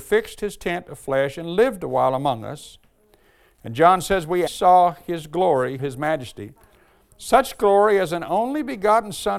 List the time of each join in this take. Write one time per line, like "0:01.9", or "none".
0:04.5
0:05.8